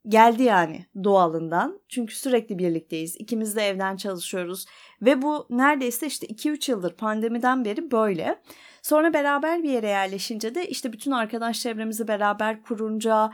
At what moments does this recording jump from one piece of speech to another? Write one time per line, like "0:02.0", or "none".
none